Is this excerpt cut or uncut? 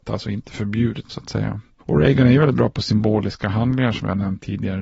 cut